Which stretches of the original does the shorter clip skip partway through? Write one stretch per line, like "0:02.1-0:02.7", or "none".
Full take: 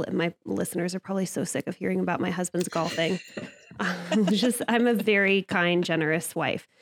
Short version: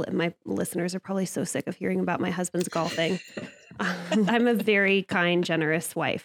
0:04.3-0:04.7